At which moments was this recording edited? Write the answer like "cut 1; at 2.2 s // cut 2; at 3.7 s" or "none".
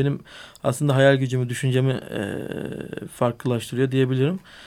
none